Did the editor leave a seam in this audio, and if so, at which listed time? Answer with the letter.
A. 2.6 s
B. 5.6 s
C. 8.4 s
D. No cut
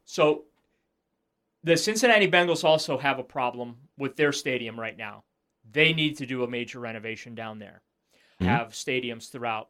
C